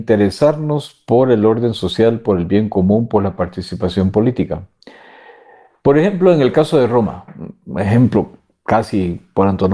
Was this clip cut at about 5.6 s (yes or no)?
no